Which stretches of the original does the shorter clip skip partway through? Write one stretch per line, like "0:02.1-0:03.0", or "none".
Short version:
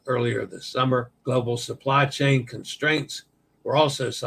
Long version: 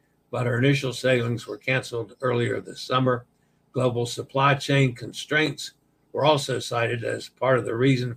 0:03.3-0:03.7